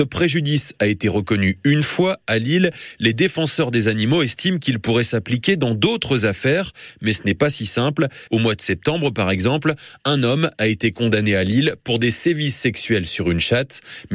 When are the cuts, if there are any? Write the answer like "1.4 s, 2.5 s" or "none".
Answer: 8.3 s